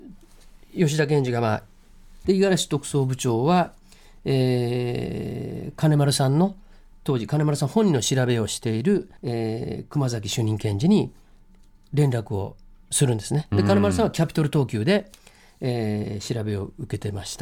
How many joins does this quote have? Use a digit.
2